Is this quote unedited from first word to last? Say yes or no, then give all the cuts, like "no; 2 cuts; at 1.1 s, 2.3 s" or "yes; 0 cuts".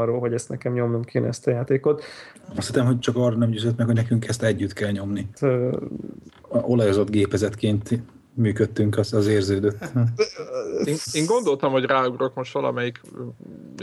no; 1 cut; at 5.3 s